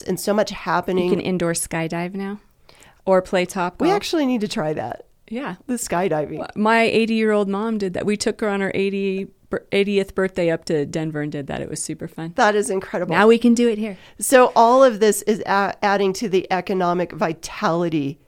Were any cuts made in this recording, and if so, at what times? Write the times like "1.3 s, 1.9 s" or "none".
none